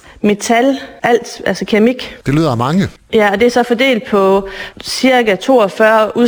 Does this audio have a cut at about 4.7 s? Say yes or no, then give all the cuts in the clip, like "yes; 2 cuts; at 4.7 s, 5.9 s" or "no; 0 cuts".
no; 2 cuts; at 1.0 s, 2.2 s